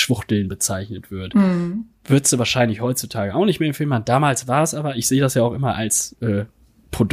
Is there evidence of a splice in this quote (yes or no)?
no